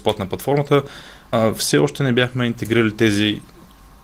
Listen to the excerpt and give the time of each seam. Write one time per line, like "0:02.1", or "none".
0:01.3